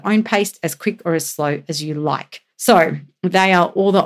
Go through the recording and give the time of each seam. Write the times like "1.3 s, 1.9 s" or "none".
2.5 s